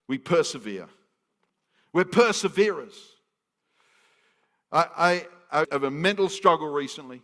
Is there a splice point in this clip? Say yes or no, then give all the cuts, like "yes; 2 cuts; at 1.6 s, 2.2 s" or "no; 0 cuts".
yes; 1 cut; at 5.6 s